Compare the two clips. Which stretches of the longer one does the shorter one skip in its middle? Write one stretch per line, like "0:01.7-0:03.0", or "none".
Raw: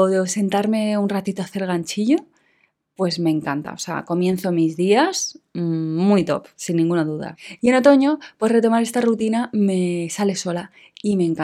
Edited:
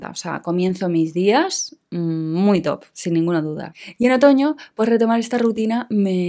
none